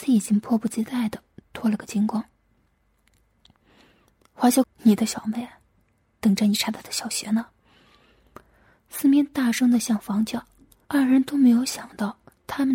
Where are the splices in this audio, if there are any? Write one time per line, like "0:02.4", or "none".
0:04.6
0:10.9